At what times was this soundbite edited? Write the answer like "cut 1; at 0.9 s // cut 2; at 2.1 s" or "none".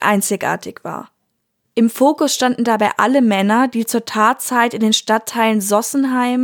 none

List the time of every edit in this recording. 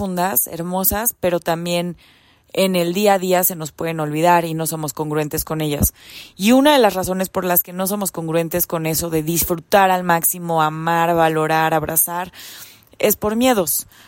none

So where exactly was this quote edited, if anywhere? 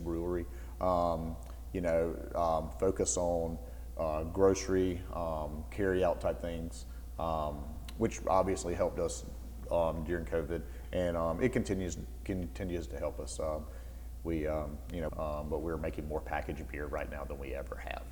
cut 1; at 15.1 s

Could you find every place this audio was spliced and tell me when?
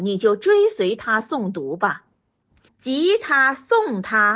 cut 1; at 2.7 s

